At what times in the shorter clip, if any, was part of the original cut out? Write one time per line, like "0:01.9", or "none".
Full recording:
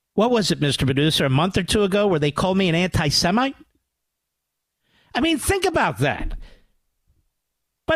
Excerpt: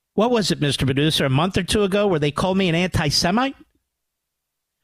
none